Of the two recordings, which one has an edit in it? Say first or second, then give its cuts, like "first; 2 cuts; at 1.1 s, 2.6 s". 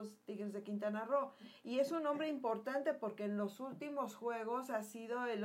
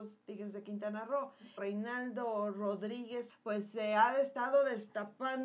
second; 2 cuts; at 1.6 s, 3.3 s